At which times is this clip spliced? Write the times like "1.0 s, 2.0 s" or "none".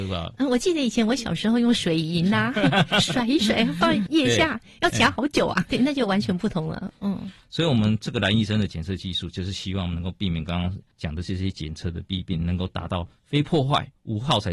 5.6 s, 7.0 s